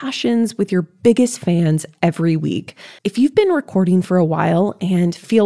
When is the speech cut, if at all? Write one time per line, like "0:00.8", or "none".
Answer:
0:03.0